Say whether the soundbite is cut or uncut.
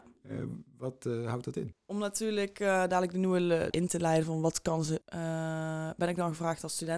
cut